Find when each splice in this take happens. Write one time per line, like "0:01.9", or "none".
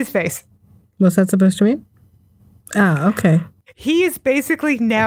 0:02.6